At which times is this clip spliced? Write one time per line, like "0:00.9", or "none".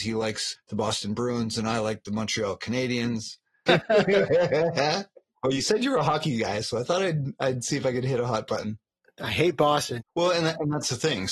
0:03.7
0:10.0